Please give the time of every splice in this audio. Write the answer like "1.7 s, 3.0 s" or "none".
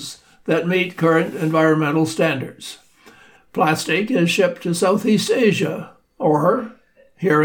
3.4 s